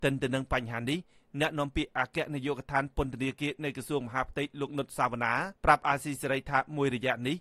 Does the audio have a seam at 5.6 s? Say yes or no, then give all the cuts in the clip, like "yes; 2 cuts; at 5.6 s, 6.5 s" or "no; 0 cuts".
yes; 1 cut; at 5.6 s